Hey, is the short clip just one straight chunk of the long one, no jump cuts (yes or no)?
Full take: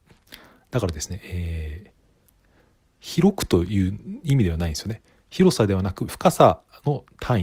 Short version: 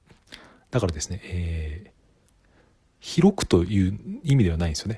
yes